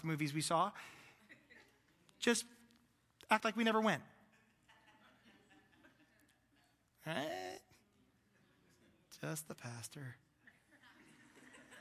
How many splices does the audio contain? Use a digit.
0